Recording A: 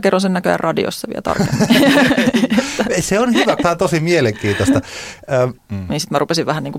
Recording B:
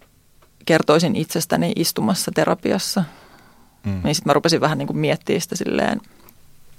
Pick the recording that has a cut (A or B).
A